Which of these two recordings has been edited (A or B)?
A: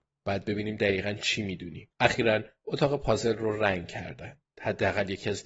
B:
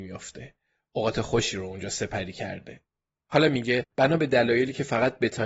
A